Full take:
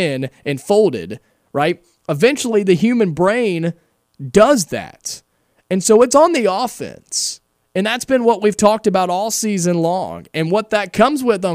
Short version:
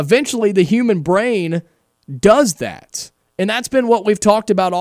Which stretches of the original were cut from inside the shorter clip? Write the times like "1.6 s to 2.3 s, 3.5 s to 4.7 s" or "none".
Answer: 5.3 s to 7.6 s